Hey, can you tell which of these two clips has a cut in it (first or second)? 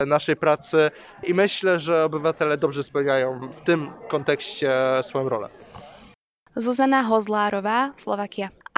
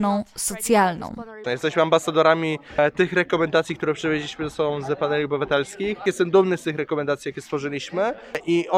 second